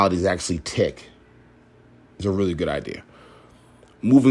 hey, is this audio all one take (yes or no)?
yes